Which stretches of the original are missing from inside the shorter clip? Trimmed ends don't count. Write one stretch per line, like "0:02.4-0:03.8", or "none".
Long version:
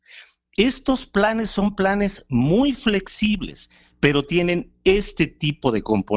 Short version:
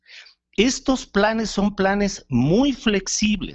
none